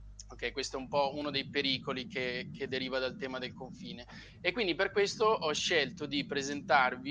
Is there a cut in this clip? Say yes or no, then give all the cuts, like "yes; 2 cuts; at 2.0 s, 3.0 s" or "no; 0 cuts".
no; 0 cuts